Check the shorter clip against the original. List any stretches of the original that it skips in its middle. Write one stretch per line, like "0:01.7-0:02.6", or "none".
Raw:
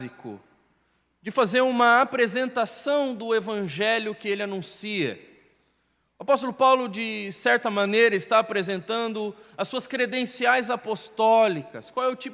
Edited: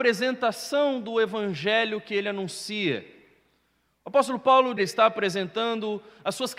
0:06.9-0:08.1

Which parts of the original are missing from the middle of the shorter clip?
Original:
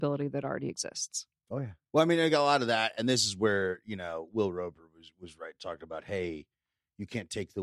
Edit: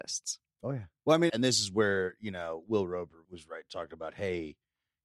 0:02.2-0:02.9
0:04.9-0:05.1

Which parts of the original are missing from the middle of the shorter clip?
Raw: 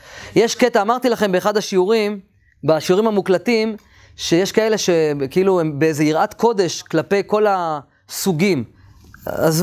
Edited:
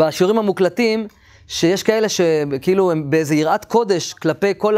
none

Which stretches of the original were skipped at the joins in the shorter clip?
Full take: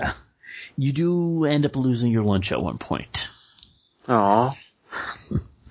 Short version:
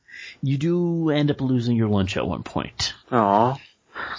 0:03.3-0:04.0

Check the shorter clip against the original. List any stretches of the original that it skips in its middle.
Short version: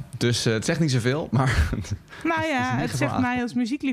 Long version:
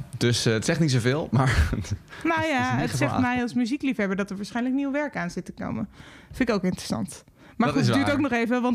none

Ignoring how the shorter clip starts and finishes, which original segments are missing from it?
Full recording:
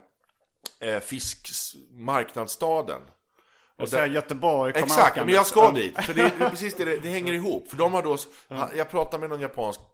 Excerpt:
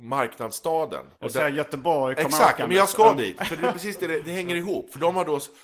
0:03.1-0:03.7
0:06.1-0:06.3

